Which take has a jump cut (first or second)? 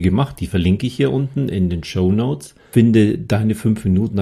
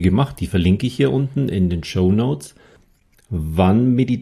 first